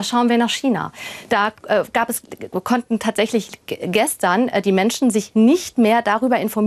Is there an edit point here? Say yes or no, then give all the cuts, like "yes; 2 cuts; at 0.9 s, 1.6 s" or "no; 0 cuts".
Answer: no; 0 cuts